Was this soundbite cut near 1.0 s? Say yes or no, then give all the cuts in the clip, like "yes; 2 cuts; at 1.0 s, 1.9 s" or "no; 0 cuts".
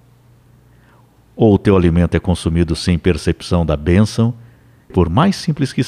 no; 1 cut; at 4.9 s